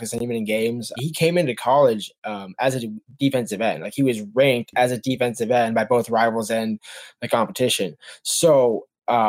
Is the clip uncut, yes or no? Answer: no